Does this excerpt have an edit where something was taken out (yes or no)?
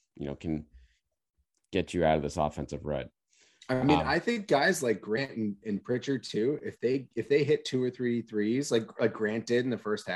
no